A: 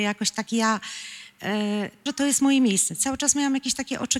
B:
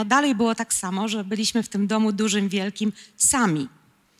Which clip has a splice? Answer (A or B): A